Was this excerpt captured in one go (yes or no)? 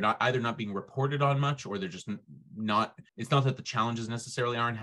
no